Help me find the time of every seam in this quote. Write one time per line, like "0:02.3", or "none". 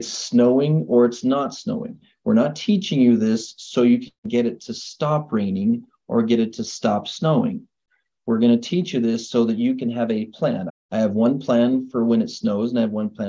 0:10.7